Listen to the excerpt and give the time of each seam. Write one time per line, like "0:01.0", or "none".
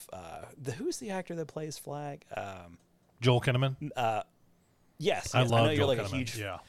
none